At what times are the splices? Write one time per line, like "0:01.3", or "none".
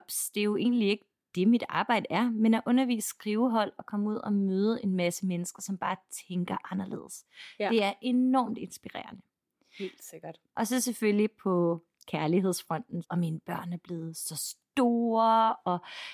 0:13.0